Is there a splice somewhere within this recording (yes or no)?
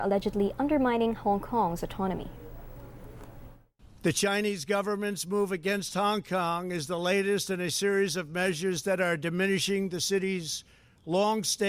no